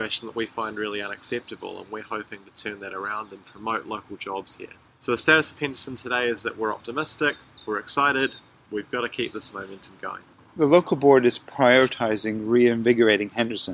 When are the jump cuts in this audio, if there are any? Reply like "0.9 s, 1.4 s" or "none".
none